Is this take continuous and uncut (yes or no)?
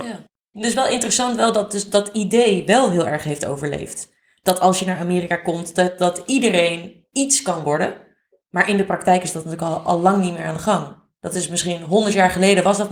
yes